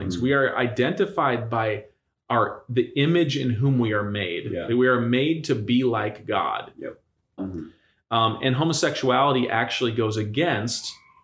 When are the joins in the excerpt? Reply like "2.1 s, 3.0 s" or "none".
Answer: 7.4 s